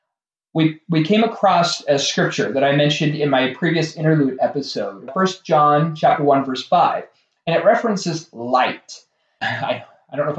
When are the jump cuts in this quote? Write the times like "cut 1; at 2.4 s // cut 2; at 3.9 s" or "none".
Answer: cut 1; at 5.1 s // cut 2; at 9.4 s